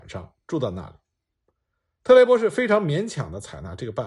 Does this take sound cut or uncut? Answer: uncut